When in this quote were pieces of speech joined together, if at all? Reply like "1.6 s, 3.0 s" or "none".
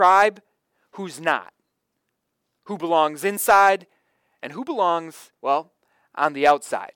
5.4 s